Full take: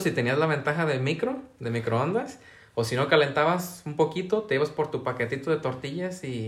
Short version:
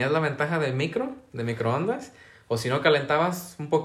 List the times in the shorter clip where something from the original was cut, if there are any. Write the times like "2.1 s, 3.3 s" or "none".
none